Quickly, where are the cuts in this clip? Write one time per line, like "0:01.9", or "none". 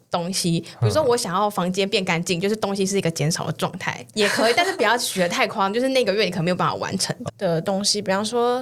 0:04.1
0:07.3